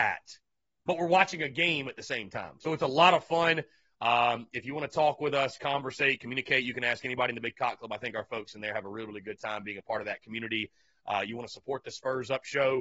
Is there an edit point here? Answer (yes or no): no